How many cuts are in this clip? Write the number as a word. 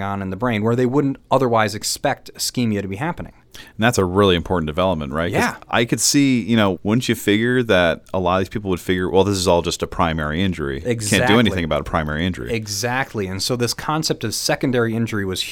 one